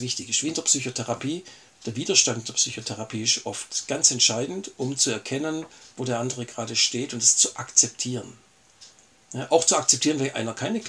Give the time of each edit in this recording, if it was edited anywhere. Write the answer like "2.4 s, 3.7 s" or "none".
none